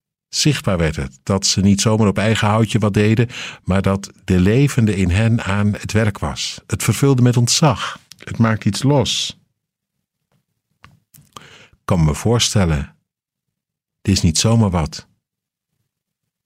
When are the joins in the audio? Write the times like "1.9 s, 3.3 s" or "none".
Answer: 8.1 s